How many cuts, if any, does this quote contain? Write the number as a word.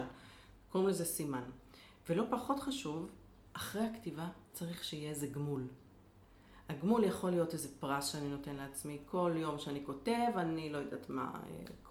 zero